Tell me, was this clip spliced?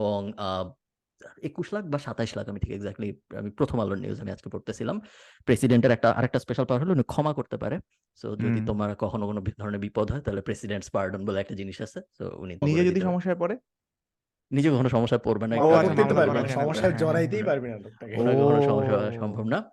yes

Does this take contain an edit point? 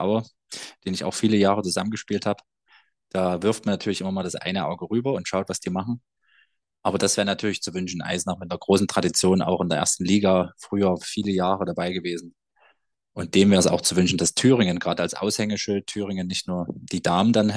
no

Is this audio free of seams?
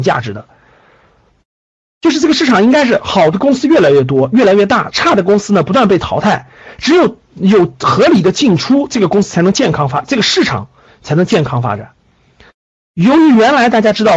yes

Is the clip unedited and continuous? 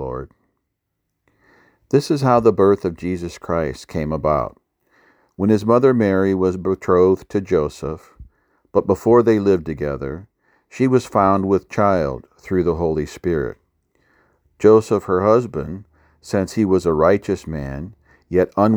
yes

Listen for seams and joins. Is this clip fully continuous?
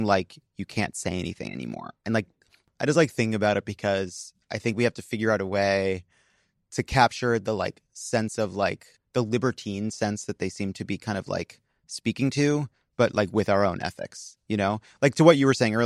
no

